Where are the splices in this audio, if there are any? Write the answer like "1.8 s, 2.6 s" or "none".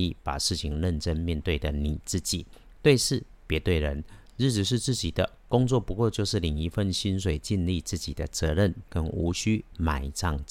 8.9 s